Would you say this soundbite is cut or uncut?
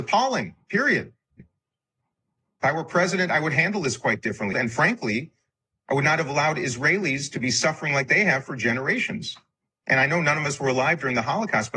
cut